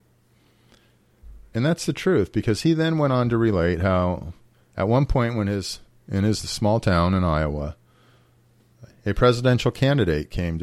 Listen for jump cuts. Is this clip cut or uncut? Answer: uncut